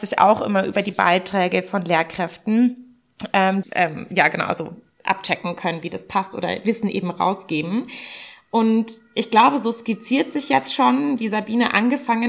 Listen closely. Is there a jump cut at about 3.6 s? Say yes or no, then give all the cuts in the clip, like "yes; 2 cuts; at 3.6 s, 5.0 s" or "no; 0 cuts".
yes; 1 cut; at 3.6 s